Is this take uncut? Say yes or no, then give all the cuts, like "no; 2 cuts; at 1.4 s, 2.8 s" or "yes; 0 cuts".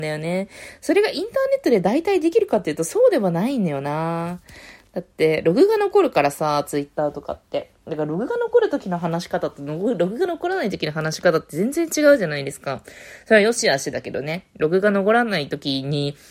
yes; 0 cuts